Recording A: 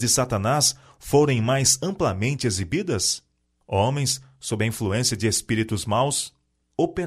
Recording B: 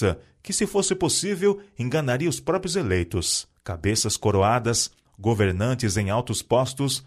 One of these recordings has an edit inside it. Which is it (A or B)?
B